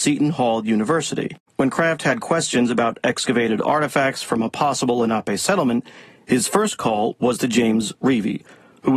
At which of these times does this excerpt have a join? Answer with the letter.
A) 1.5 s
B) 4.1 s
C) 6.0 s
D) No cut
A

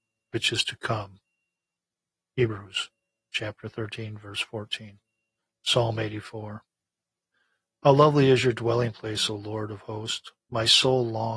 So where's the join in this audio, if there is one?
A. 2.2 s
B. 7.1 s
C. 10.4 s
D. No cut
D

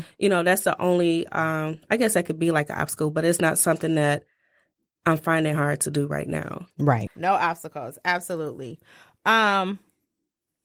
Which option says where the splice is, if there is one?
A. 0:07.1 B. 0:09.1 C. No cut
A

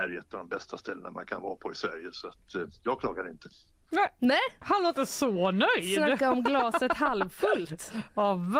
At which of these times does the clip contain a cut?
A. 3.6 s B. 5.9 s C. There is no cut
C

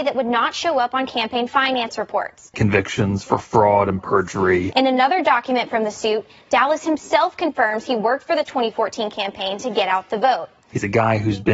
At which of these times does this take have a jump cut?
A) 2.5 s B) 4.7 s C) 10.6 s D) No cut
A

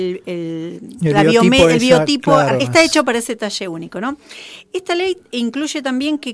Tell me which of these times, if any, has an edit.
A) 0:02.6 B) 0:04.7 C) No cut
A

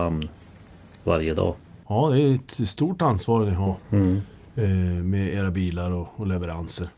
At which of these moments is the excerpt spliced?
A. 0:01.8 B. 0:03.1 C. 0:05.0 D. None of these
A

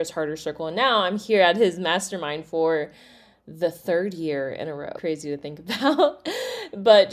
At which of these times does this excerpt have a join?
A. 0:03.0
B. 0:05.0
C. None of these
B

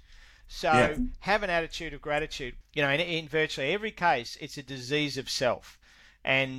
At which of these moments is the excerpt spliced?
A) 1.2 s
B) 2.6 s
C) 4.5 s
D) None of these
B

